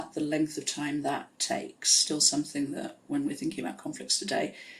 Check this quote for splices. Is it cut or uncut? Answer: uncut